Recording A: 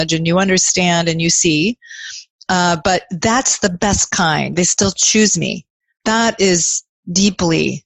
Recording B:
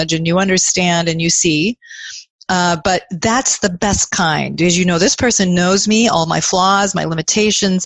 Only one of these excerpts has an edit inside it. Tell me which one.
A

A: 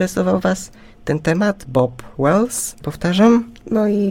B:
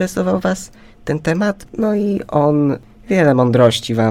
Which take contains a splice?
B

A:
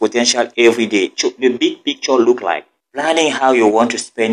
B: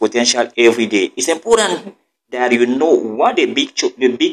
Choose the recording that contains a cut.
A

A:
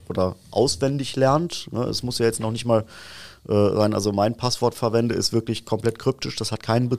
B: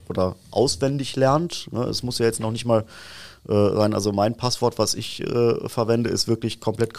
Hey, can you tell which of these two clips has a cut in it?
A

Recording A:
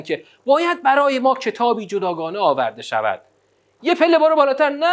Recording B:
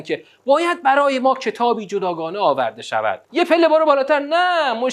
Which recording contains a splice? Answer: B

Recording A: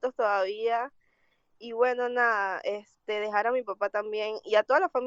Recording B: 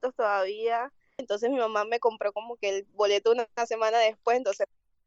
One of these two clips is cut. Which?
B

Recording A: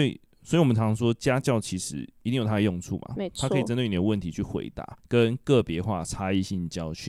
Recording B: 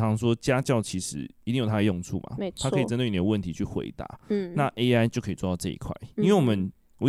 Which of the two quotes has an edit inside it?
A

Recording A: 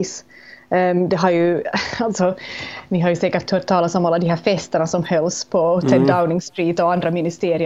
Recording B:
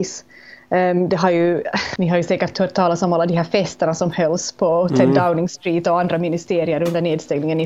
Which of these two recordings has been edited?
B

